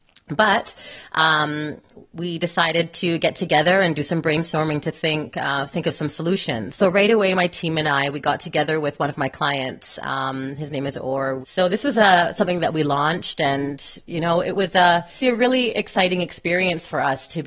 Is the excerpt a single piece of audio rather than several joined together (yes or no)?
no